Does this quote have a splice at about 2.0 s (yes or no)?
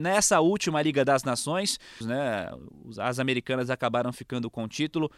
yes